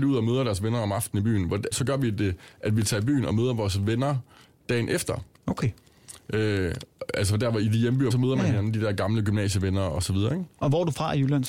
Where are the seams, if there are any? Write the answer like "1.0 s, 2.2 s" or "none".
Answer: 1.7 s, 8.1 s